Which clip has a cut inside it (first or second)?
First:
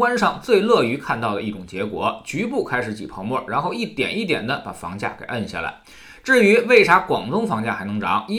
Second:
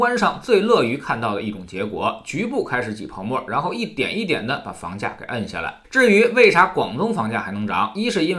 second